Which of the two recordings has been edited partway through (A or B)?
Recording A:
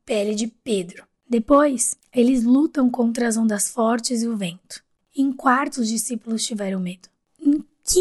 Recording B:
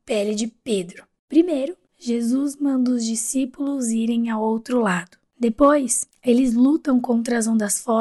A